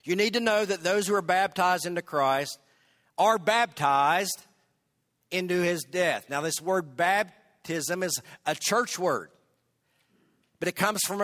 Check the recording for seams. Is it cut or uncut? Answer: uncut